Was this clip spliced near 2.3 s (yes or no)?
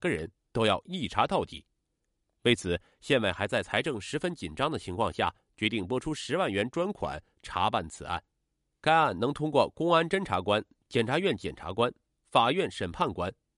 no